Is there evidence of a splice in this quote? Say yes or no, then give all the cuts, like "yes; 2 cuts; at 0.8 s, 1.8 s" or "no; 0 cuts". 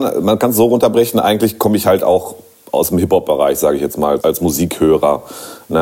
yes; 1 cut; at 4.2 s